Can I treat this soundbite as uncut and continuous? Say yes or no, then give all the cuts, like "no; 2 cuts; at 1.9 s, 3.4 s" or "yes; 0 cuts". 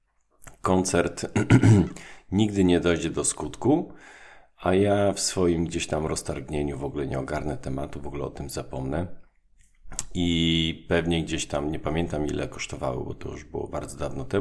yes; 0 cuts